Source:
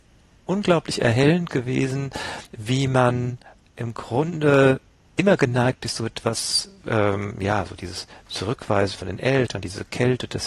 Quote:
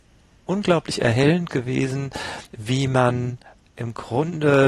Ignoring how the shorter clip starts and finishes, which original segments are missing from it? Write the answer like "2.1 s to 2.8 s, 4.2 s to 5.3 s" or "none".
none